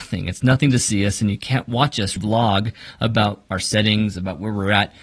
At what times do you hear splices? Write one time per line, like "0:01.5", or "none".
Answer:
0:02.2